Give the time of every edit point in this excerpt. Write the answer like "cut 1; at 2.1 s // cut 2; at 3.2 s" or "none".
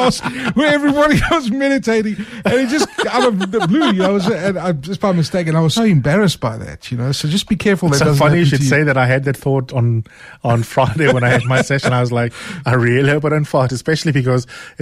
cut 1; at 5.8 s